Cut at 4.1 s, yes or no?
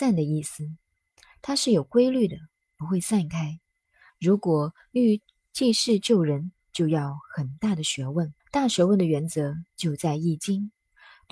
yes